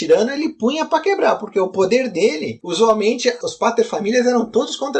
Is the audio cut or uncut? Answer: uncut